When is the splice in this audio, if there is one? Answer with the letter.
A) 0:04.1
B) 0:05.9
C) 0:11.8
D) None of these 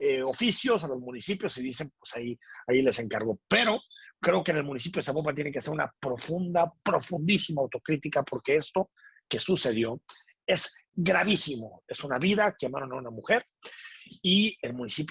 B